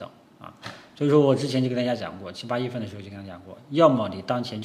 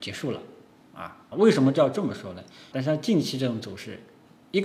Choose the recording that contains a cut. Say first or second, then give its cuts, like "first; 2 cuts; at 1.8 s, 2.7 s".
second; 2 cuts; at 1.3 s, 2.7 s